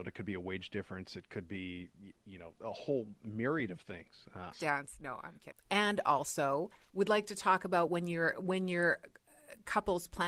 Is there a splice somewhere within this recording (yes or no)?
yes